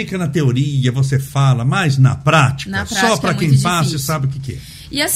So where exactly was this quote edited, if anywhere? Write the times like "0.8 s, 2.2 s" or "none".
none